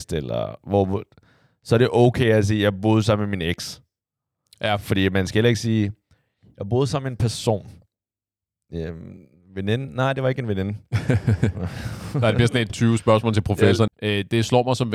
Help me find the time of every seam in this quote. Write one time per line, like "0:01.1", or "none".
0:12.7
0:13.9